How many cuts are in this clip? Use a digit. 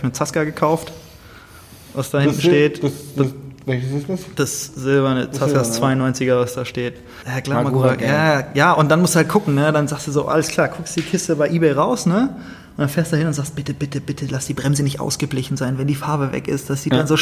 1